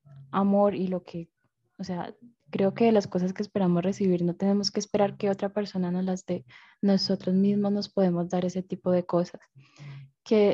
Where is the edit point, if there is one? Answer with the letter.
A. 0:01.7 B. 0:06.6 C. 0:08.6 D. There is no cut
D